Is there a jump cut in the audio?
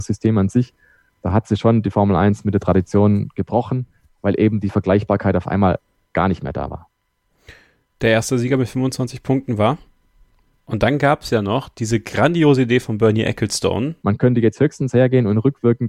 yes; 2 cuts; at 10.6 s, 14.0 s

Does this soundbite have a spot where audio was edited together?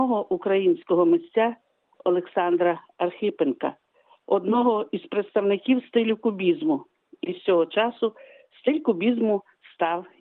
no; 0 cuts

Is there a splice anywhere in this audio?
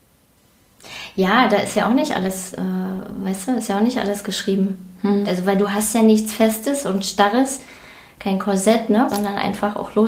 yes; 2 cuts; at 5.2 s, 9.1 s

